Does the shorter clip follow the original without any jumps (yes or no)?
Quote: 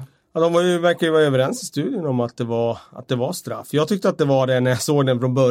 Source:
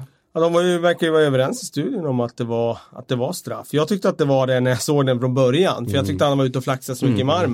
yes